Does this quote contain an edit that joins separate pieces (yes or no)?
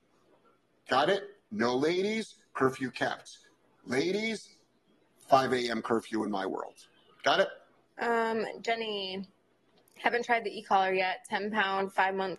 yes